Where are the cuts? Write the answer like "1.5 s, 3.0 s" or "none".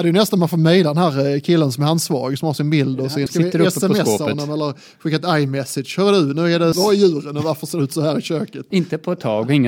3.3 s, 6.7 s, 8.7 s